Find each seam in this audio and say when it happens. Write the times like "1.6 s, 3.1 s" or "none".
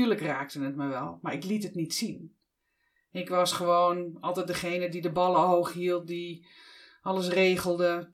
none